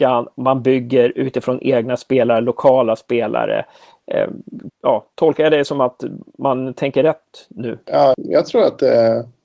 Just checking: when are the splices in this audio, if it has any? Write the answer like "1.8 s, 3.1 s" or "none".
4.7 s, 8.1 s